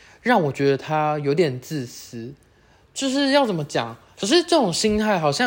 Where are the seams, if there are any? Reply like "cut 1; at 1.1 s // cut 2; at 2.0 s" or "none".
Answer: cut 1; at 4.1 s